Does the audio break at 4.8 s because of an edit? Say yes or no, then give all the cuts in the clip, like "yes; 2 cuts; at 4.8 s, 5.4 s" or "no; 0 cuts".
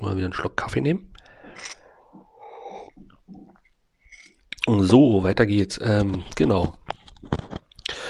no; 0 cuts